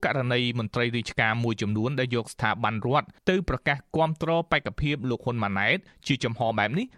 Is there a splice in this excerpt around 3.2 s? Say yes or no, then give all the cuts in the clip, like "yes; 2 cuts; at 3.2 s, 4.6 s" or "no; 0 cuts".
yes; 1 cut; at 3.2 s